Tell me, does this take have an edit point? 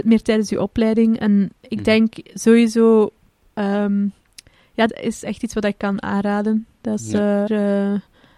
yes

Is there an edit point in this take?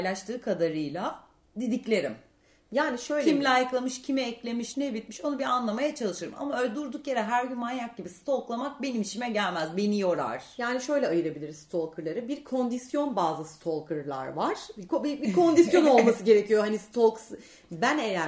yes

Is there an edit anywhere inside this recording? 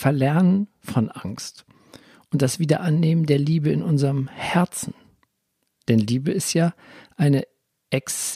no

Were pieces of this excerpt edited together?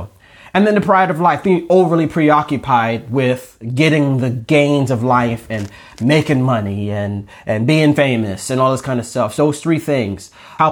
yes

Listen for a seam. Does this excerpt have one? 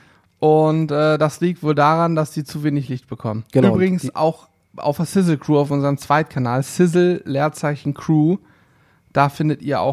no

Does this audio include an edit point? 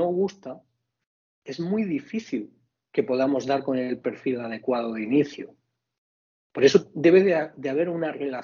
no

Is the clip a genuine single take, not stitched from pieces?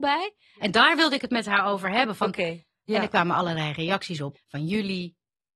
no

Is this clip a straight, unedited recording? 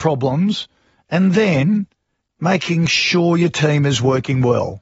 yes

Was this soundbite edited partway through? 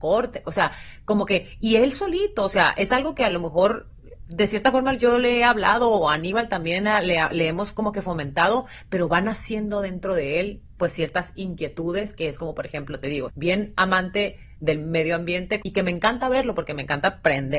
yes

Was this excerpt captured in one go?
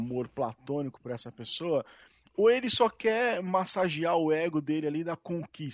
yes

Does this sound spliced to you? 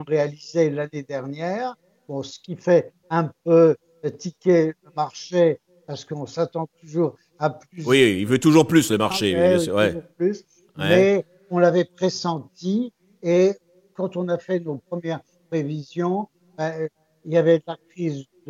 no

